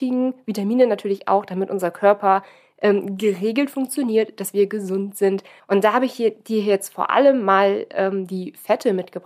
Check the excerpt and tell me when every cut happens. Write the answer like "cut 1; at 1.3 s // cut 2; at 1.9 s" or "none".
cut 1; at 5.6 s

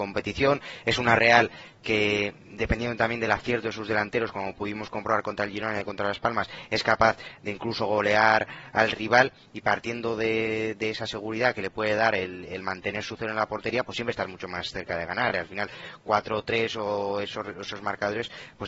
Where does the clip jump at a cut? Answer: none

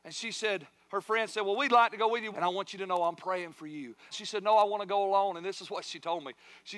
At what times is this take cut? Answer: cut 1; at 2.3 s // cut 2; at 4.1 s

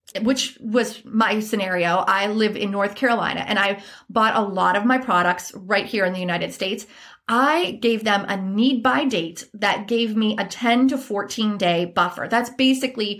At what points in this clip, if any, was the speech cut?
none

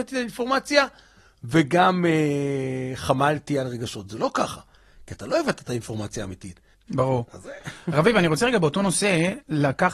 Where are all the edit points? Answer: cut 1; at 6.7 s

